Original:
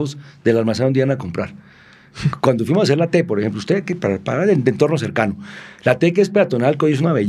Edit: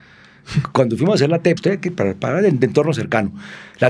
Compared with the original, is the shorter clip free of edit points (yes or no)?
no